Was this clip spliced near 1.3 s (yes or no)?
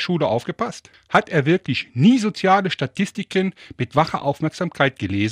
no